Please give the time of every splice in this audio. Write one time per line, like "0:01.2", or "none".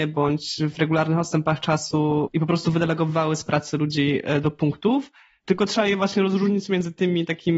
0:05.4